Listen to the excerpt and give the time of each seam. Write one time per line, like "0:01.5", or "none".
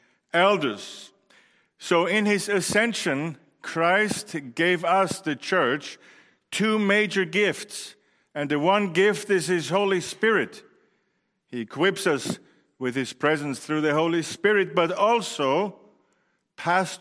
none